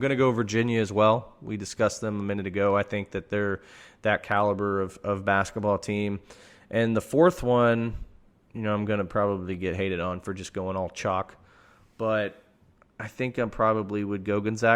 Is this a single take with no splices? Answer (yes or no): yes